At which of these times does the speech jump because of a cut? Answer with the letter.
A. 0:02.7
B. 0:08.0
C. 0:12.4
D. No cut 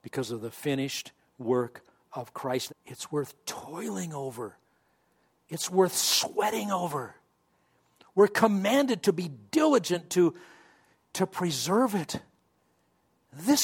A